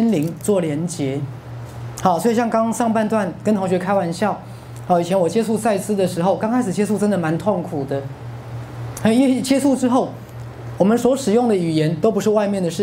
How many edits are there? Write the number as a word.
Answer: zero